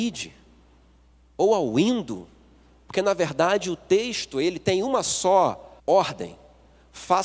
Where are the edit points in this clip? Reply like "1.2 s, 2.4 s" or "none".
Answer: 5.8 s